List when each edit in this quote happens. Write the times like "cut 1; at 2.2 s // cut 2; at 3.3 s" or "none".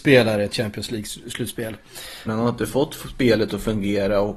cut 1; at 2.3 s